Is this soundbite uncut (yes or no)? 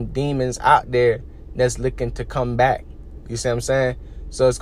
yes